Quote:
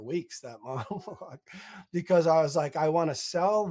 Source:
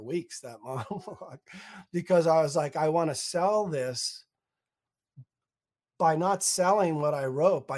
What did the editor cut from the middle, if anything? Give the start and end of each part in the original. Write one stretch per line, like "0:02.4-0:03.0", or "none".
none